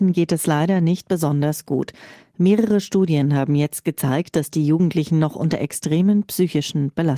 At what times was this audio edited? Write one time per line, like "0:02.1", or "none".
none

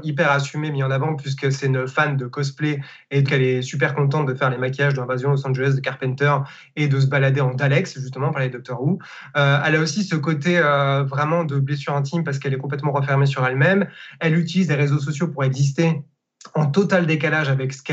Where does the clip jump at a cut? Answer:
0:03.2

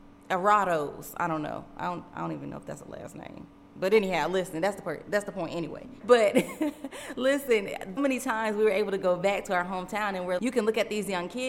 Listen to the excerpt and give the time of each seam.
0:06.0
0:08.0
0:10.4

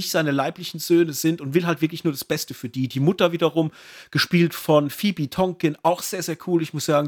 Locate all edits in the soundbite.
none

